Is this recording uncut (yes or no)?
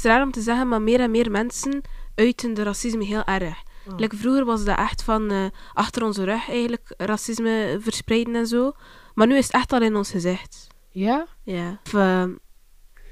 no